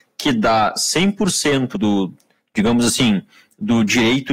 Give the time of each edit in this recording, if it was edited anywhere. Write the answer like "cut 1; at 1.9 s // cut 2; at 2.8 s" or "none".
cut 1; at 1.7 s